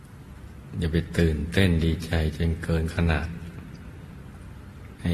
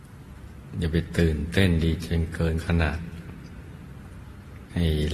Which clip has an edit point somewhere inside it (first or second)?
second